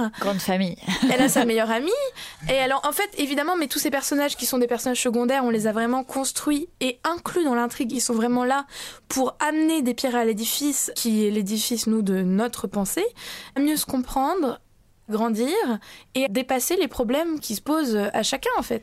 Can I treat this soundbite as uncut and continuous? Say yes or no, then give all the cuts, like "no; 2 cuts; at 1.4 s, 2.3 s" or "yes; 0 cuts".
yes; 0 cuts